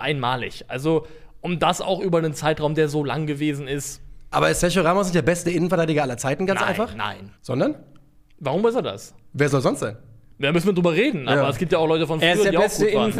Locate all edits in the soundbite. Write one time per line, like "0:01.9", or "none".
0:07.4